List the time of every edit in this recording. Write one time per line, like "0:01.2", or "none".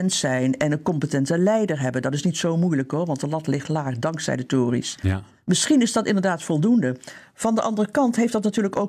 none